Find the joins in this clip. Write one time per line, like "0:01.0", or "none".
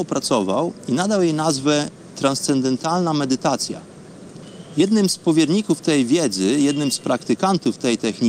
none